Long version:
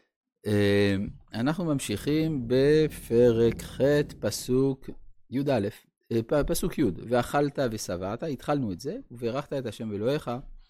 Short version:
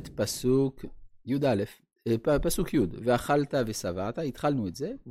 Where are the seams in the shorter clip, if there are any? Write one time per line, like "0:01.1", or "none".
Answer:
none